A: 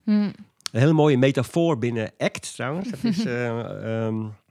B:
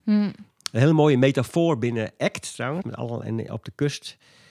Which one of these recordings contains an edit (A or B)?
B